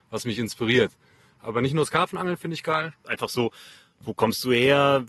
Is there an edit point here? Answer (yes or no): yes